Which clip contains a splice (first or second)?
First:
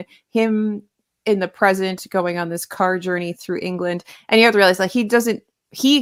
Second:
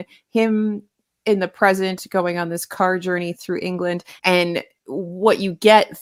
second